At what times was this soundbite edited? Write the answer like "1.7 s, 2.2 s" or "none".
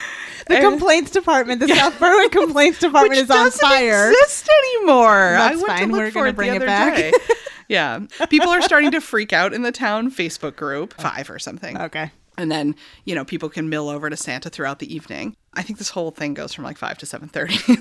8.1 s, 11.0 s

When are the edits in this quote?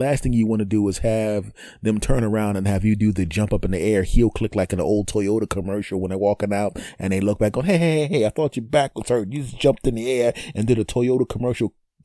none

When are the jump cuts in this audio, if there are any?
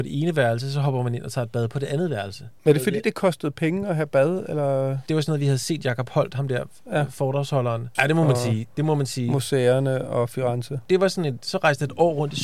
8.0 s

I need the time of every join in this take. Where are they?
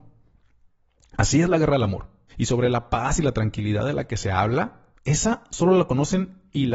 2.3 s, 4.9 s

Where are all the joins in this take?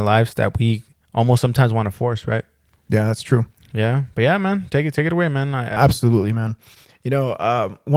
5.8 s

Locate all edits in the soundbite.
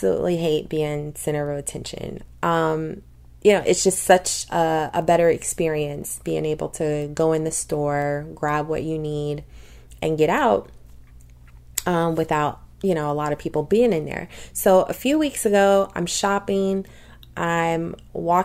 2.3 s

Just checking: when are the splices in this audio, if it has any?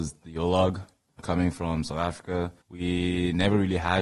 1.2 s, 2.6 s

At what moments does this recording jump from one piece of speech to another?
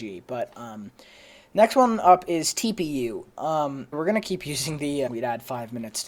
3.9 s, 5.1 s

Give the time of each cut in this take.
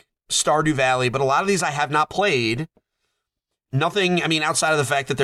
3.7 s

